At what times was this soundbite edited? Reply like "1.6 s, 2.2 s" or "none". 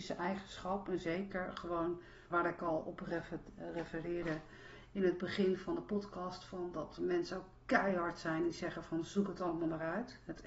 2.3 s